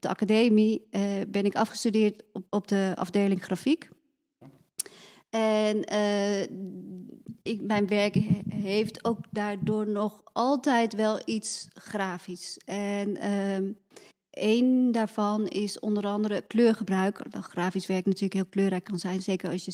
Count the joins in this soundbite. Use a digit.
1